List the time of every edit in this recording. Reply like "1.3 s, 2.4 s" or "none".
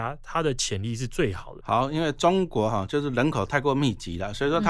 1.6 s